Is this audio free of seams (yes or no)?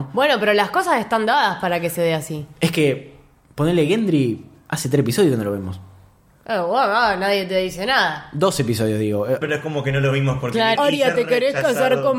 no